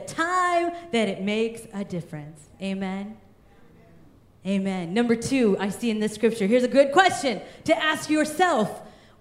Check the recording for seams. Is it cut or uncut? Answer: uncut